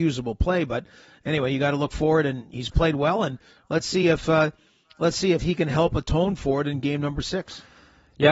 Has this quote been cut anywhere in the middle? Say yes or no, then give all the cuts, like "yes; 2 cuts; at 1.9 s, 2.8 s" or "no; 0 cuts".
no; 0 cuts